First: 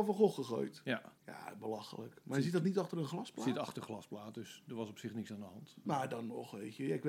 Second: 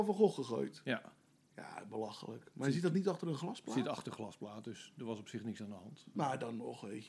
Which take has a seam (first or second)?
first